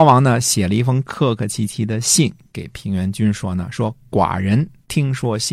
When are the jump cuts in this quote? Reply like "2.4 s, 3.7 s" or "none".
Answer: none